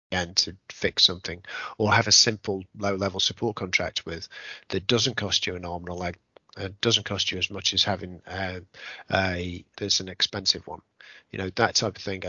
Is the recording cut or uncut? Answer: cut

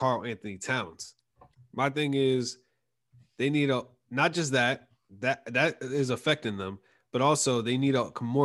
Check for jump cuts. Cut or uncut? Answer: cut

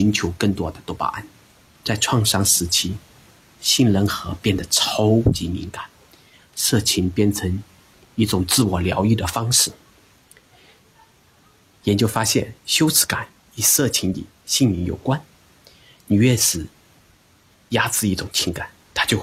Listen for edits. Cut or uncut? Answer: cut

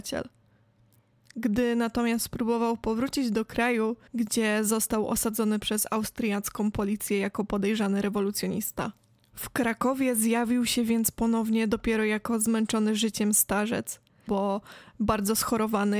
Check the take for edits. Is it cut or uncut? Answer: cut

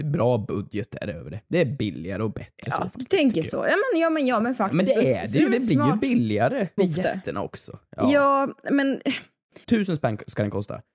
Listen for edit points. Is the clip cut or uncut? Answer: cut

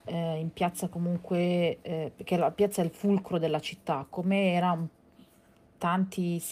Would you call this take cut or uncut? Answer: uncut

